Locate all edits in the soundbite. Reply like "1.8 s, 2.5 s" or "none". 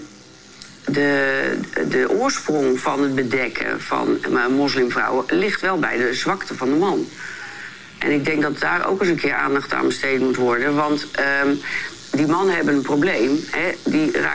none